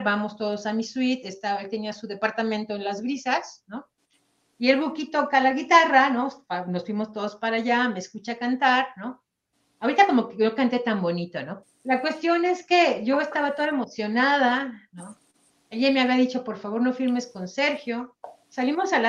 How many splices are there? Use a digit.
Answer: 1